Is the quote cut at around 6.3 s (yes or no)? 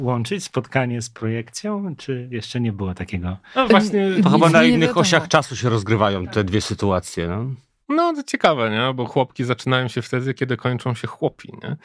no